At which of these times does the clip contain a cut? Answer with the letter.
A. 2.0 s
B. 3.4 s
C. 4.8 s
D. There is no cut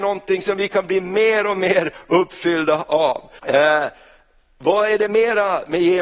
B